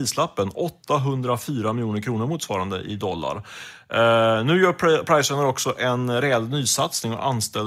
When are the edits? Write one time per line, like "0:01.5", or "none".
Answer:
none